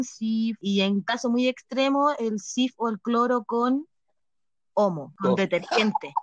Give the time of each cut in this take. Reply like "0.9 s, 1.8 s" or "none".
none